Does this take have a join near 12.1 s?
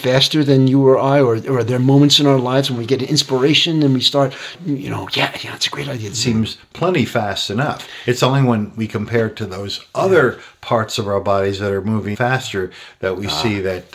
yes; 2 cuts; at 6.1 s, 12.1 s

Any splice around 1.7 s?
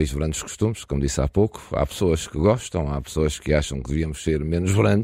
no; 0 cuts

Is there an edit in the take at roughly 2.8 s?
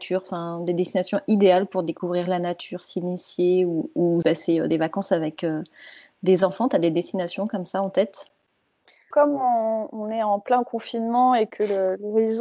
no; 2 cuts; at 4.2 s, 9.1 s

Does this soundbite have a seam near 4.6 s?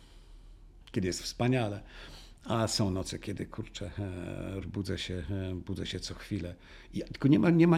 yes; 1 cut; at 4.6 s

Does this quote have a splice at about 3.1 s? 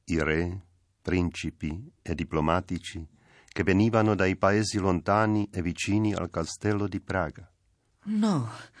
no; 1 cut; at 7.9 s

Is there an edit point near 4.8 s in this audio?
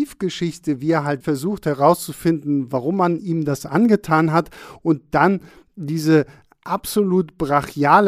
no; 1 cut; at 1.2 s

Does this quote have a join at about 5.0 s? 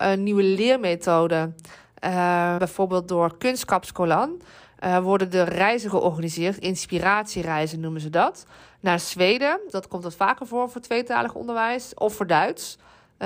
no; 2 cuts; at 2.6 s, 9.7 s

